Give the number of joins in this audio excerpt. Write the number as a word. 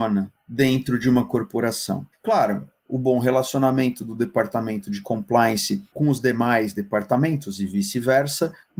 zero